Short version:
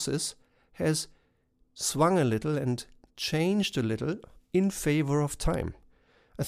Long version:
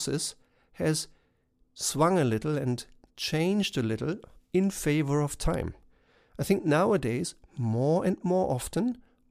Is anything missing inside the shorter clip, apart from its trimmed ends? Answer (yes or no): no